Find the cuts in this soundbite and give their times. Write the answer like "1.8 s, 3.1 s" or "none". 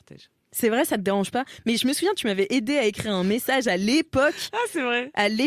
none